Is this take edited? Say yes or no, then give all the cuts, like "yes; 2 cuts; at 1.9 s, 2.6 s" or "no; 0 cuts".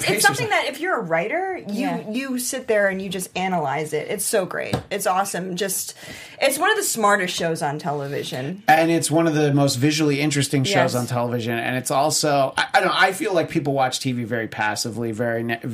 no; 0 cuts